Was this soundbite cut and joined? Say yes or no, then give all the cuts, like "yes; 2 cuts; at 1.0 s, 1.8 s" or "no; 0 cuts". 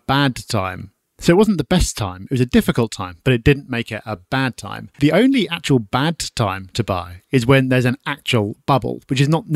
yes; 1 cut; at 4.9 s